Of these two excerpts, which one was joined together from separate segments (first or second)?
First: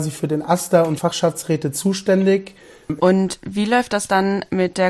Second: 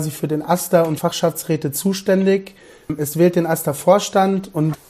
first